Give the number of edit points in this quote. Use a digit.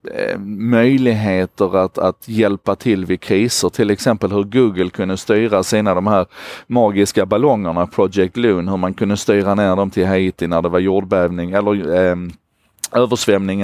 0